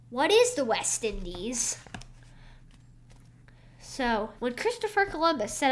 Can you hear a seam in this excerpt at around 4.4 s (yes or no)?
yes